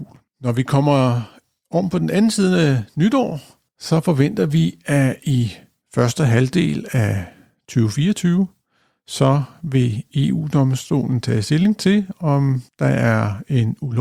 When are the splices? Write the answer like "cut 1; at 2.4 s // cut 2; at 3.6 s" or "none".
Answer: none